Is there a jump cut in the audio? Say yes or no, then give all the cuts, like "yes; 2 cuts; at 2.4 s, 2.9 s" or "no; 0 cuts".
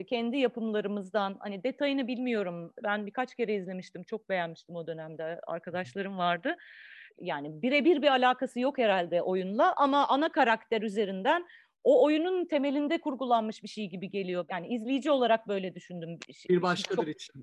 yes; 1 cut; at 2.8 s